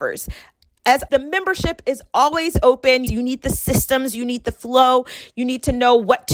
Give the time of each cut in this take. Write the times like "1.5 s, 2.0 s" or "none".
1.1 s, 3.1 s